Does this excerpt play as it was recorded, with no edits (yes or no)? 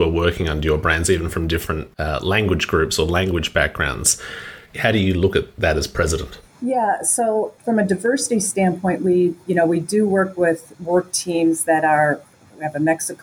no